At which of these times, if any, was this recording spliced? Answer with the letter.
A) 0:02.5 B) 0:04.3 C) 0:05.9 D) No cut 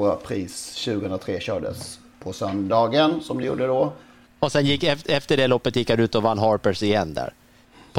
B